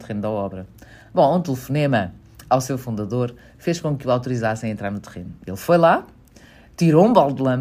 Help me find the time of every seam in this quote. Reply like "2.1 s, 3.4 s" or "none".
none